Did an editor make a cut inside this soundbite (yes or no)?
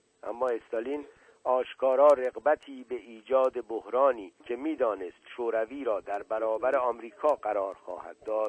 yes